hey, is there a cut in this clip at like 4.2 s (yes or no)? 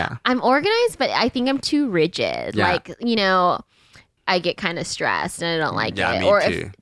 yes